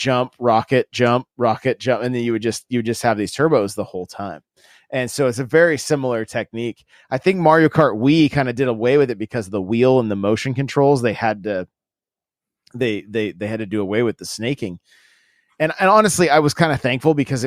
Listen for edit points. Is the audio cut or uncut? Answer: uncut